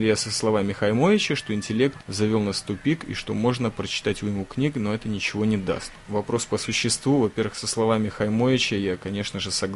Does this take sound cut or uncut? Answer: uncut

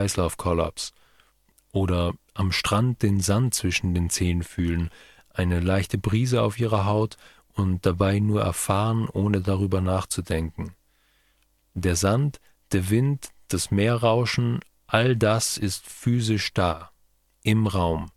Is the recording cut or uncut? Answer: uncut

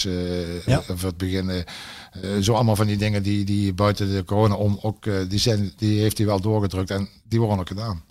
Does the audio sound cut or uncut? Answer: uncut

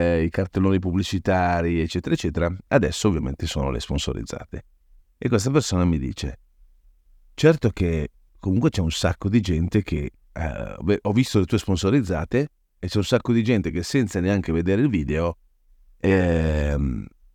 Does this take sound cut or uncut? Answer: uncut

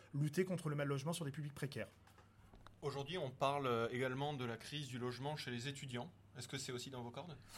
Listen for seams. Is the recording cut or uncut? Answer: uncut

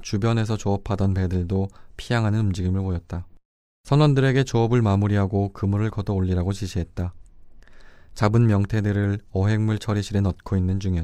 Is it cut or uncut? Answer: uncut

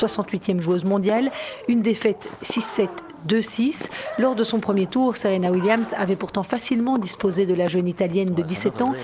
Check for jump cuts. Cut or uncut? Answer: uncut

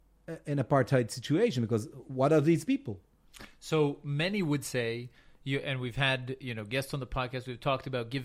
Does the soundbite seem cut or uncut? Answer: uncut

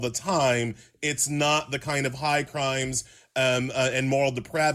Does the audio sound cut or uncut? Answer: uncut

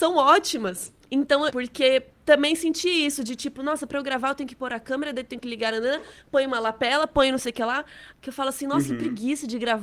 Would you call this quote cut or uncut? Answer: cut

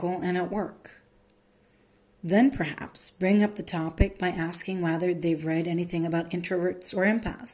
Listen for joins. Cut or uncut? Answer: uncut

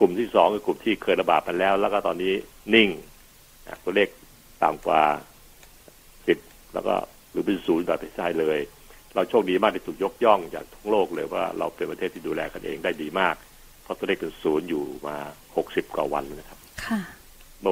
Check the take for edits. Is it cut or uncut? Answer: uncut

